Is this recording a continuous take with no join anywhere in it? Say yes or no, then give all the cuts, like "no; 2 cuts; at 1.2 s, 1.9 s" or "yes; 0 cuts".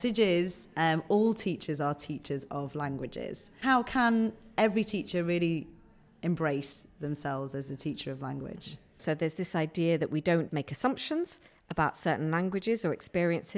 no; 2 cuts; at 9.0 s, 10.5 s